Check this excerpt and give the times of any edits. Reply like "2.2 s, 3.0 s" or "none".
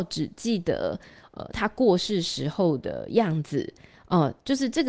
none